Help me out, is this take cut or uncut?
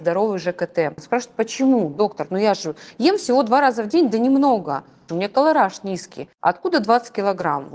cut